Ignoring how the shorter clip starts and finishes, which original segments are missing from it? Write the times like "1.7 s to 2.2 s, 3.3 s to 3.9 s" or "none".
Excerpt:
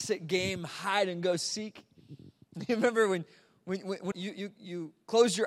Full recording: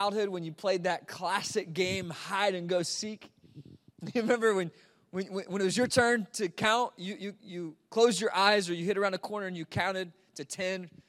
5.6 s to 6.9 s